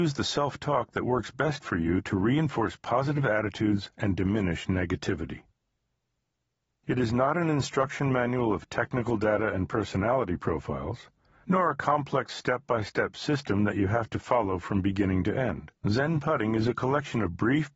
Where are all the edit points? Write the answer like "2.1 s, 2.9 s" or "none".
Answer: 6.8 s, 15.8 s